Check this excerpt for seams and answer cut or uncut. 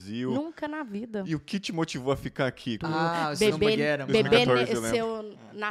cut